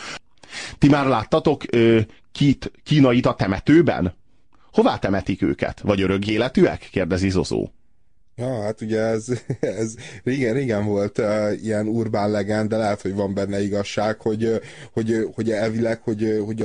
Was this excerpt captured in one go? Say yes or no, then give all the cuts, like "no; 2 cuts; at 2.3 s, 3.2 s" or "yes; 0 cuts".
yes; 0 cuts